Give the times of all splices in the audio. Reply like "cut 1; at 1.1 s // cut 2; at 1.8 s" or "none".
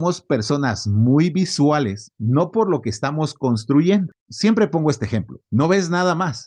cut 1; at 2.1 s // cut 2; at 5.4 s